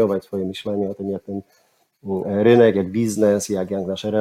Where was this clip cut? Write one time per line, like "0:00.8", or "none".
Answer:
none